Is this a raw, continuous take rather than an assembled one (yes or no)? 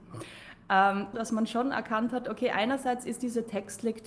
no